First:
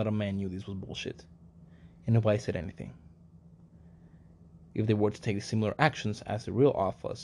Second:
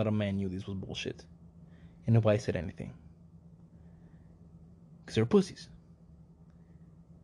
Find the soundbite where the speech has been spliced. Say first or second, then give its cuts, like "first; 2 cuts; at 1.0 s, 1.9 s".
first; 1 cut; at 4.7 s